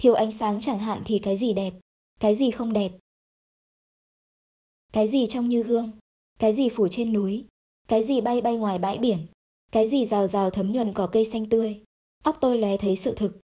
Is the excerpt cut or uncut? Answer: uncut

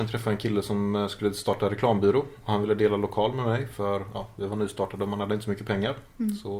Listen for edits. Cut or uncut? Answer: uncut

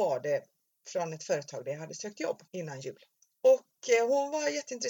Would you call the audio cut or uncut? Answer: cut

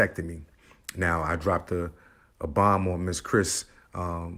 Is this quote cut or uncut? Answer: uncut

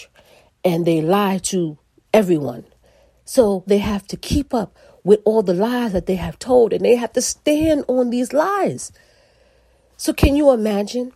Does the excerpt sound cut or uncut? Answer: cut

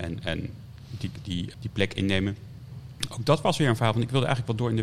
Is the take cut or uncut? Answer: cut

